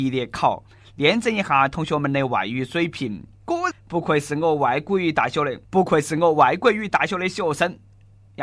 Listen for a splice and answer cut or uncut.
cut